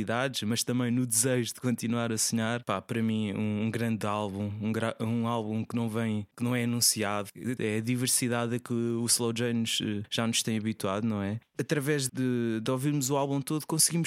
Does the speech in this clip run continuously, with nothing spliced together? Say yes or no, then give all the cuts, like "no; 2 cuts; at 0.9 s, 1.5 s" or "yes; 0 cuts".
no; 3 cuts; at 2.6 s, 7.6 s, 12.1 s